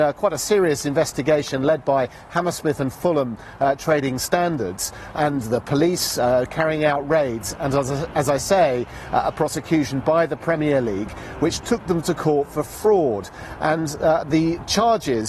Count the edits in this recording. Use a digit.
1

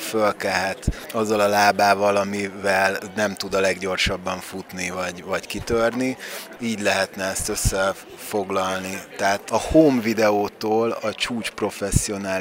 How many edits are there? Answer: 1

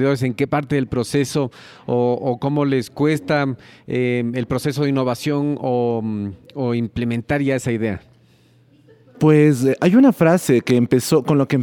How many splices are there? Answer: 0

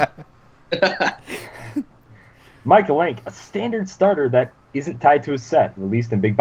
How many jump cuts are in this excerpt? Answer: 0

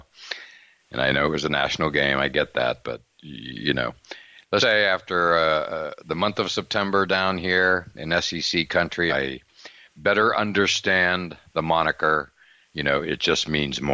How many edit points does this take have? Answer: 2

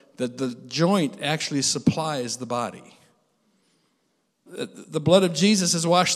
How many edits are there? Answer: 1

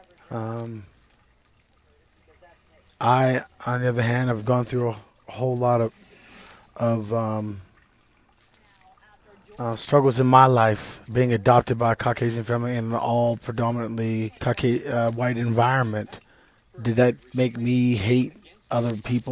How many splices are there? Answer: 2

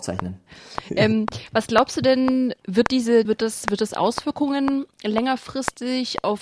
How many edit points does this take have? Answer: 1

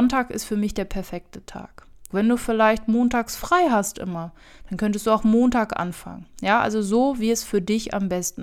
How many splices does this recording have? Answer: 1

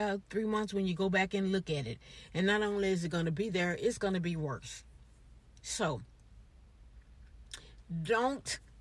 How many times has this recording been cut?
0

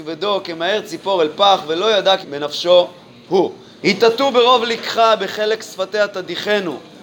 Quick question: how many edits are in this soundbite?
2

